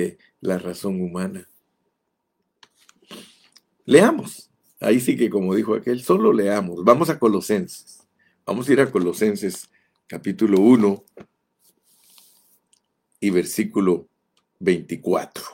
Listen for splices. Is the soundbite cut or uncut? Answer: uncut